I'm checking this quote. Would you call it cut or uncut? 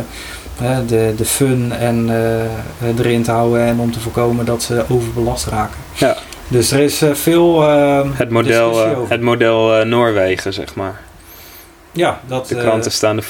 uncut